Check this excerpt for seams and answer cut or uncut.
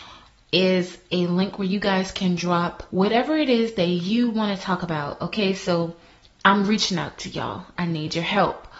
cut